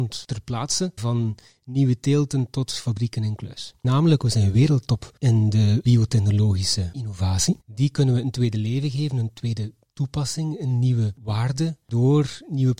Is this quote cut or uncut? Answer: cut